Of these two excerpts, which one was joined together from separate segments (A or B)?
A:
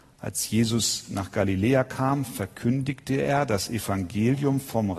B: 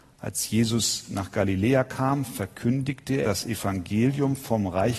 B